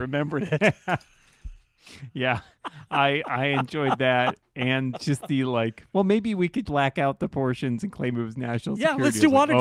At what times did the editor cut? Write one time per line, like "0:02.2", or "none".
0:06.7